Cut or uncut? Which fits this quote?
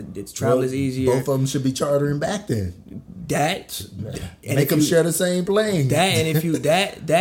uncut